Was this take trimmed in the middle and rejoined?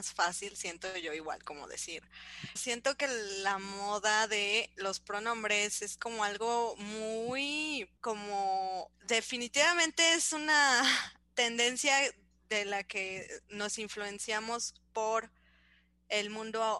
yes; 2 cuts; at 2.6 s, 8.0 s

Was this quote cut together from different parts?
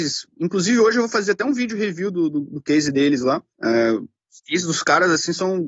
no; 0 cuts

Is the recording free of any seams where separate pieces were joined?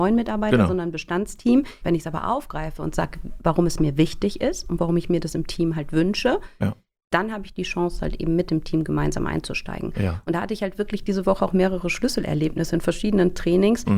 no; 1 cut; at 1.8 s

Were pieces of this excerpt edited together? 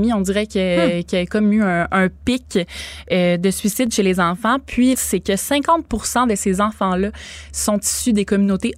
yes; 1 cut; at 4.9 s

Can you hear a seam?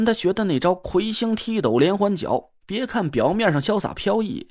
no; 0 cuts

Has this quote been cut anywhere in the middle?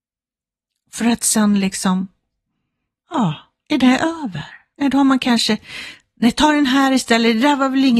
no; 0 cuts

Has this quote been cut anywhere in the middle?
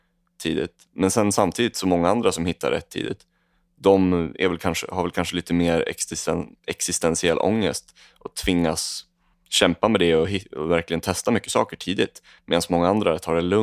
no; 0 cuts

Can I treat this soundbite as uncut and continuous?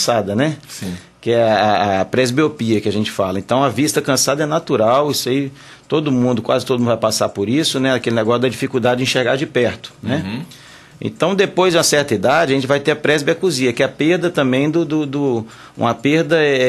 yes; 0 cuts

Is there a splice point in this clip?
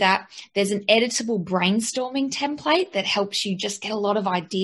no; 0 cuts

